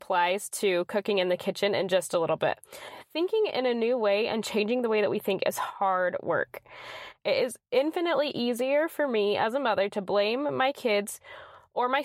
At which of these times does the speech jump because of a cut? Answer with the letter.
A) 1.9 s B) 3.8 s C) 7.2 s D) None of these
C